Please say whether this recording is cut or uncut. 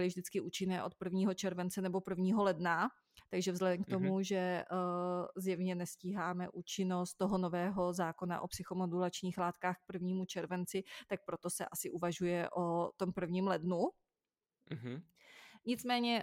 uncut